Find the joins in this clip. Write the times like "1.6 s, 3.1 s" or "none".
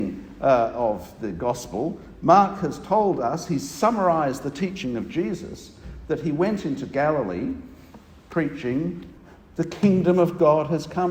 none